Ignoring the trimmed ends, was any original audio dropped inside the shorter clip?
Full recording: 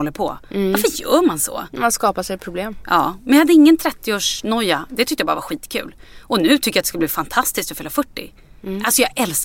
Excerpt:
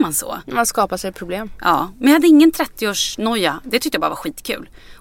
no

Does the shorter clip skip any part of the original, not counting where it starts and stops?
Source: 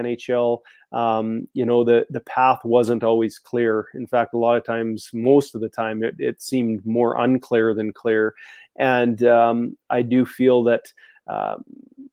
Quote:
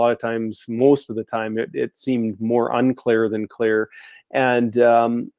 no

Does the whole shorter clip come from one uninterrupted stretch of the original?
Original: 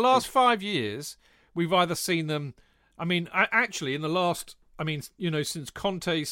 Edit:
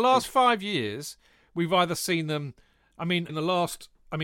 no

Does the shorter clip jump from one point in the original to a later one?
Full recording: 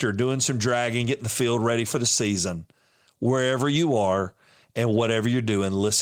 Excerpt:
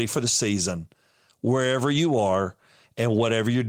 no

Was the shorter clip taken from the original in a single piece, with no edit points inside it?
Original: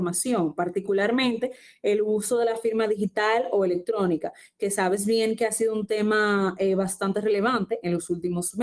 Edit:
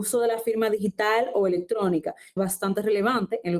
no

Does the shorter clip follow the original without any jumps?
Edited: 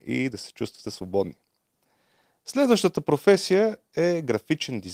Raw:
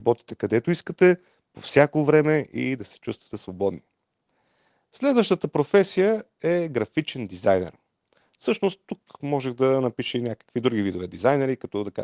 yes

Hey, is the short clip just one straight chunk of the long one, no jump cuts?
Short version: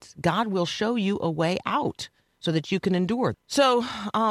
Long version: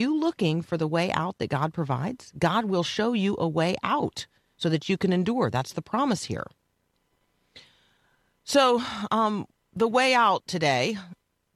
no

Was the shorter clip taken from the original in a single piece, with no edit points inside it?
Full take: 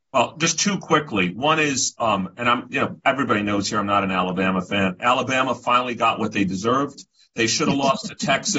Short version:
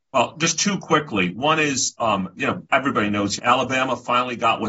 no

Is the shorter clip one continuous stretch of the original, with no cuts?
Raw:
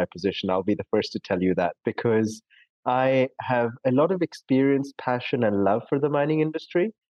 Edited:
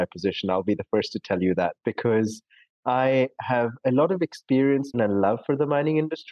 no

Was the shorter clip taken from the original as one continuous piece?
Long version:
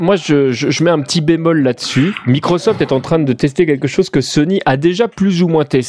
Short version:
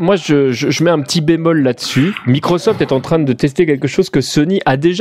yes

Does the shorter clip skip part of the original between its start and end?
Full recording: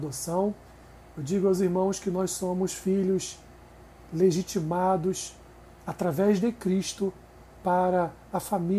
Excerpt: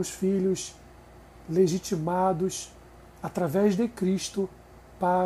no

